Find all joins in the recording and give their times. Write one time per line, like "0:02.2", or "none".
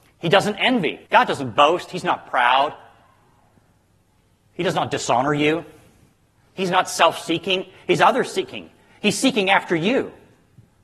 0:01.1